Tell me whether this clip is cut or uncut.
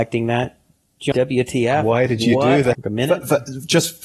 cut